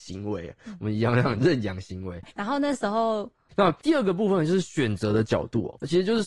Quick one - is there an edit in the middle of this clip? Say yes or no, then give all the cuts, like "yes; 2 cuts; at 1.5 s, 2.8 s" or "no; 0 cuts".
yes; 2 cuts; at 2.2 s, 3.5 s